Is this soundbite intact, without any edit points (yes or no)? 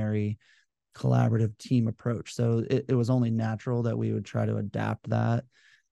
yes